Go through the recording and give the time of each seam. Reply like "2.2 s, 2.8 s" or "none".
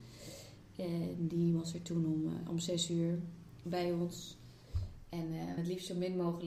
5.6 s